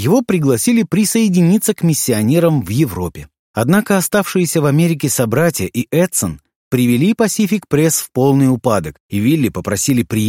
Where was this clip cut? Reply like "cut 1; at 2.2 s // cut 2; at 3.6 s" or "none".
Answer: none